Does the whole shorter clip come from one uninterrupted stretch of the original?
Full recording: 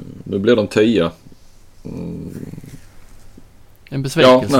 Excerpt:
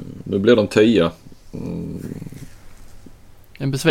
no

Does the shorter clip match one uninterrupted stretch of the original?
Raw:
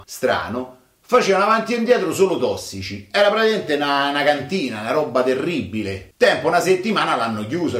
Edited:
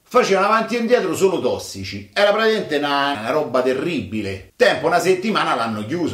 no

